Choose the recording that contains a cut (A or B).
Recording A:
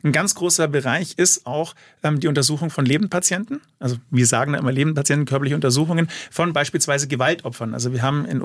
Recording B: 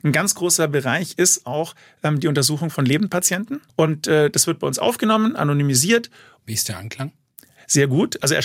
B